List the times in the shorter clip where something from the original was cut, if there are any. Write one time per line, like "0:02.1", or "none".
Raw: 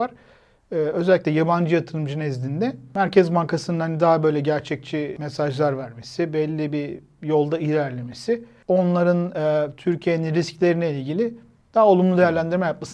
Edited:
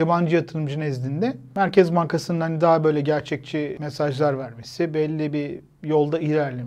none